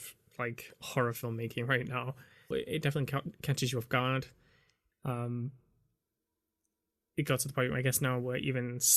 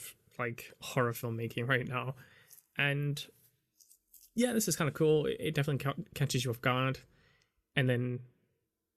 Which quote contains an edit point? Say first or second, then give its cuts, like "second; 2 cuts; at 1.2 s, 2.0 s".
first; 2 cuts; at 2.5 s, 4.9 s